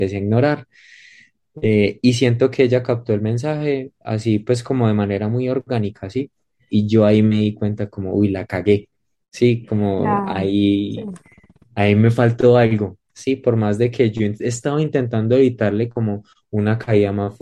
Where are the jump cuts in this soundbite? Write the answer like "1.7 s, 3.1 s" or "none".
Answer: 6.7 s